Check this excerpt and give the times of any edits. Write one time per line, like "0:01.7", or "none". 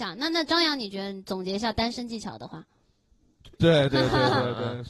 0:03.5